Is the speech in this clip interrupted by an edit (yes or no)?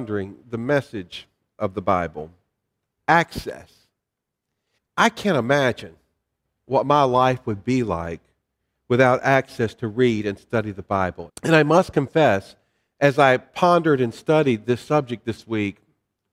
yes